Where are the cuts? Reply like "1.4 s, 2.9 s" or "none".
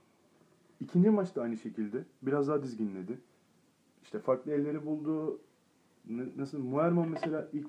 none